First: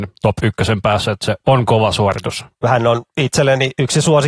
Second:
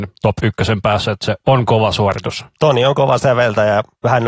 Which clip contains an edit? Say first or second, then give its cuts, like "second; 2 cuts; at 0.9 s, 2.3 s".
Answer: first; 1 cut; at 2.5 s